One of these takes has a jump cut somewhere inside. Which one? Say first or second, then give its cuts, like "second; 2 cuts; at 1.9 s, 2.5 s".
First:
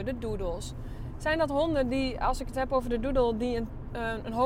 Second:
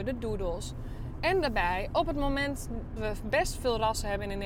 second; 2 cuts; at 1.2 s, 3.0 s